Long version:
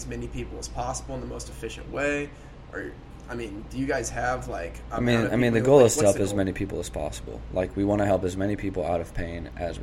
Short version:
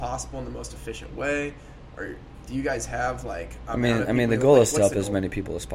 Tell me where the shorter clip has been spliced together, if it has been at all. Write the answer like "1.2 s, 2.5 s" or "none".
2.5 s